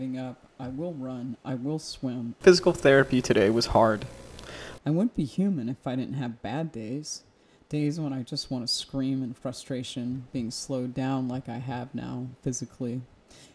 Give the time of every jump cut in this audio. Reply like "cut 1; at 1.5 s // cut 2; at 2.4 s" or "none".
cut 1; at 2.4 s // cut 2; at 4.8 s